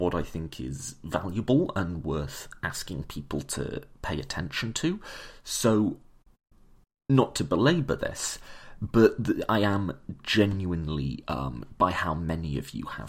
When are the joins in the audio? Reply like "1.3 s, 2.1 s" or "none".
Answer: 11.7 s